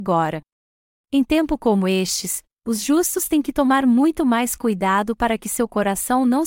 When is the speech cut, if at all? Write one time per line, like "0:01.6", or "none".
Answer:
0:00.9